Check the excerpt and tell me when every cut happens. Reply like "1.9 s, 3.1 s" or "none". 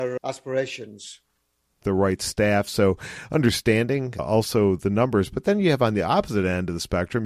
1.8 s

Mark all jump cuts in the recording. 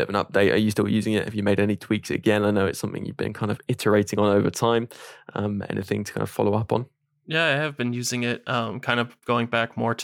none

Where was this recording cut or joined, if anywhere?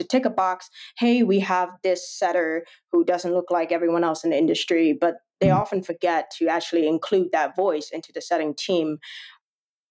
none

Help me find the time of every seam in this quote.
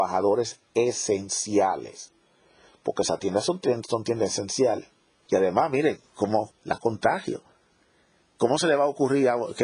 5.3 s, 6.5 s

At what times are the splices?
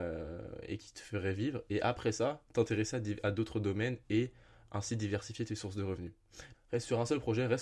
6.5 s

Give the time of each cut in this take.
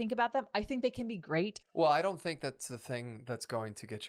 1.6 s

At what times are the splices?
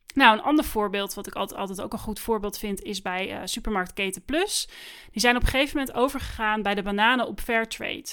none

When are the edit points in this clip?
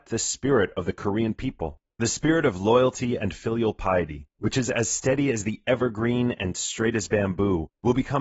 1.9 s, 4.4 s

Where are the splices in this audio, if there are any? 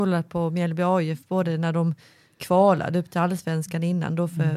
none

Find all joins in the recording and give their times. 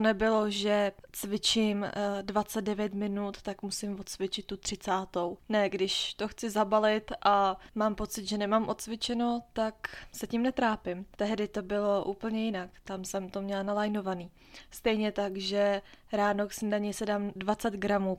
none

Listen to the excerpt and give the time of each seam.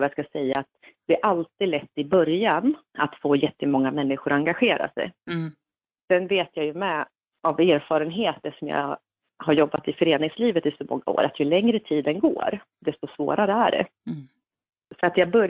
2.9 s

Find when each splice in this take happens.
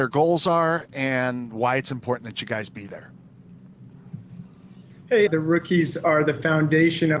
5.3 s

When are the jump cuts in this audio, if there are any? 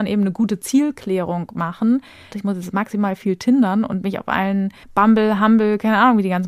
2.3 s, 4.8 s

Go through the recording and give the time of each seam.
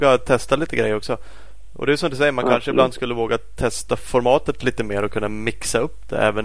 none

